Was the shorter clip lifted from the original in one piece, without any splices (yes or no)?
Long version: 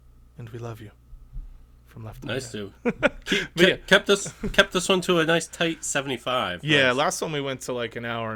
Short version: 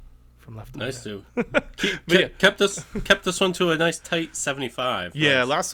yes